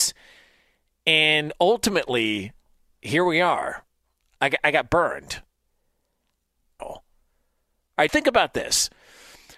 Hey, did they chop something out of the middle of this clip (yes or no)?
yes